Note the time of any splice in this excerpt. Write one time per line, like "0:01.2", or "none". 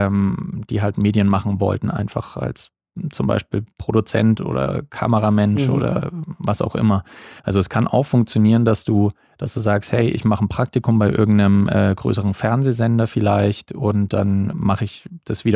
0:07.4
0:14.5